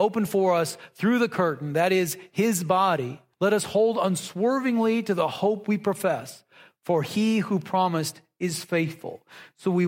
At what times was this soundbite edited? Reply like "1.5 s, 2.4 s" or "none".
3.3 s